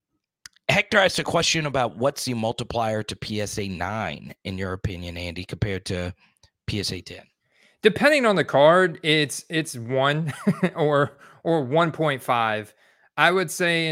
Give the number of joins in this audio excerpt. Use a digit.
0